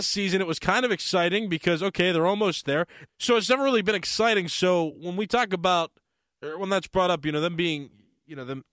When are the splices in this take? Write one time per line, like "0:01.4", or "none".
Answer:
0:03.1